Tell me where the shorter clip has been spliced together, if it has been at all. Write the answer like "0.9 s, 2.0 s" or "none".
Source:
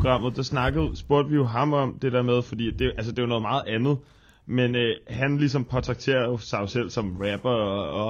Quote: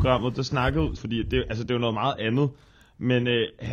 1.0 s